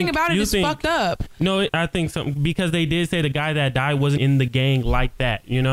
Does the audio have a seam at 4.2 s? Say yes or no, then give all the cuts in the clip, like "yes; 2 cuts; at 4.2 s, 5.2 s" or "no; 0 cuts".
yes; 2 cuts; at 1.7 s, 4.2 s